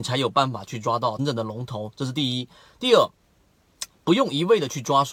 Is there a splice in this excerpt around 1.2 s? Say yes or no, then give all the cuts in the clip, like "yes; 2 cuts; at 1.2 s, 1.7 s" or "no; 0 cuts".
yes; 1 cut; at 1.2 s